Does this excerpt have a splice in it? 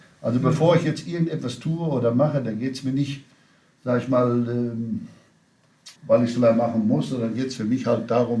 yes; 1 cut; at 6.0 s

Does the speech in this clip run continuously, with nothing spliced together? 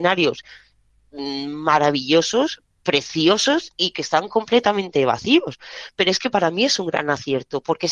yes; 0 cuts

